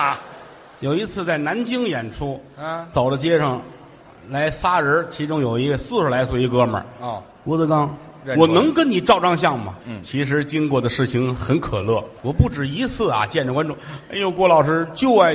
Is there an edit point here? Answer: yes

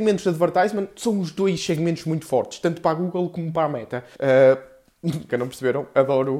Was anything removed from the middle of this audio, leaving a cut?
yes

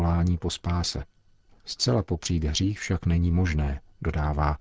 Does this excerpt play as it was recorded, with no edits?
yes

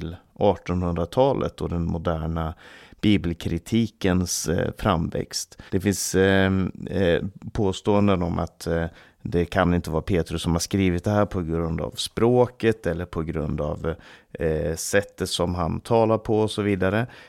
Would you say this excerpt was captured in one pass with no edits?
no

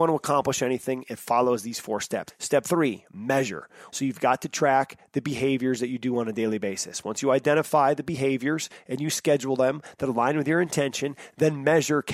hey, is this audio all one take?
no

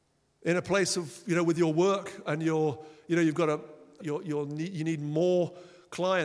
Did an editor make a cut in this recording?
yes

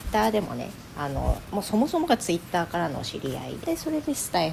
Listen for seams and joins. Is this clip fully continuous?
no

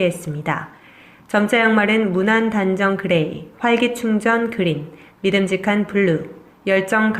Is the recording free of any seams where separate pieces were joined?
no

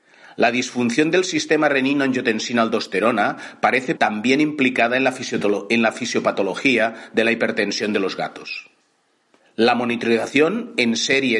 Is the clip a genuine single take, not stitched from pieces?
no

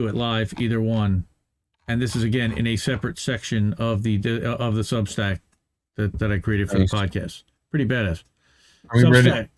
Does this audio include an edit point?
yes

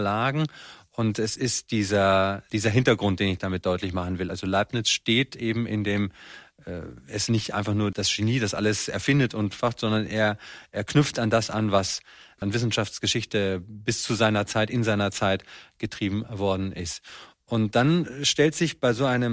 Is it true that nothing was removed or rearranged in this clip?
yes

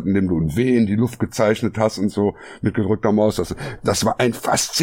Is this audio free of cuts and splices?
yes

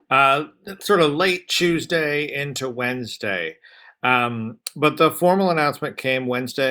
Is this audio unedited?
yes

